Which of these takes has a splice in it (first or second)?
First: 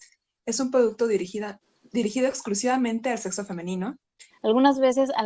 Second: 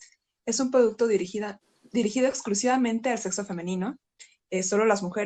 first